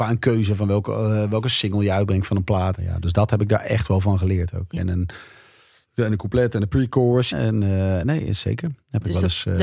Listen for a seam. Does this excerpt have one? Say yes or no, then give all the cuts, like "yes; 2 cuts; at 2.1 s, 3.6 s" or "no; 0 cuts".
yes; 3 cuts; at 2.7 s, 4.8 s, 7.3 s